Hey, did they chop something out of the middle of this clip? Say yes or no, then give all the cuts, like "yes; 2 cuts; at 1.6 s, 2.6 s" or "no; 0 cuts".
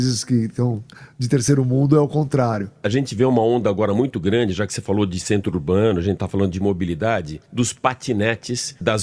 no; 0 cuts